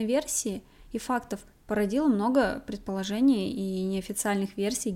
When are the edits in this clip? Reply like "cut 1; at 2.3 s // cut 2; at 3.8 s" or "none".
none